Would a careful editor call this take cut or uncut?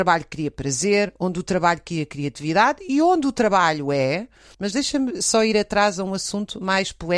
cut